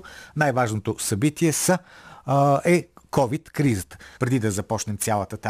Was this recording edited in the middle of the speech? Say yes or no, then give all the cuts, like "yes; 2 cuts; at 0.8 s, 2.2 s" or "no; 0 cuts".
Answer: yes; 1 cut; at 4.2 s